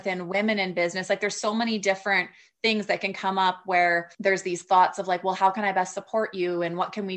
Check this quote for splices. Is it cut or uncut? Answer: cut